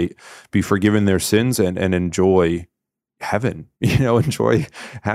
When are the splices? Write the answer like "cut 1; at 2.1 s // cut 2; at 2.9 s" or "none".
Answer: cut 1; at 3.7 s